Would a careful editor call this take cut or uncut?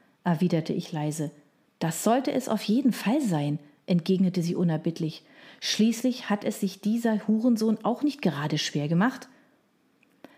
cut